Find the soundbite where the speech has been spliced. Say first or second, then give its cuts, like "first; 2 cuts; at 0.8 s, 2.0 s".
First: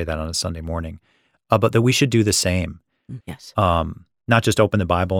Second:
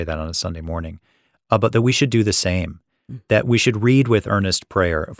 first; 1 cut; at 3.2 s